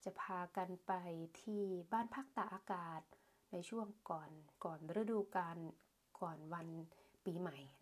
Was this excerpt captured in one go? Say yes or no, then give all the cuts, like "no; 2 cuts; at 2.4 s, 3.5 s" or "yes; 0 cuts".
no; 1 cut; at 4.5 s